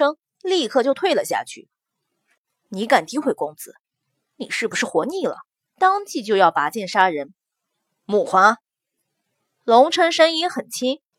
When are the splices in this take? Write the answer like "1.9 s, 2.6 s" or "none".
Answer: 2.7 s, 5.7 s